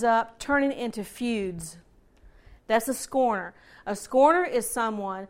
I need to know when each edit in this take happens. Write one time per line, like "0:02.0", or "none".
0:02.6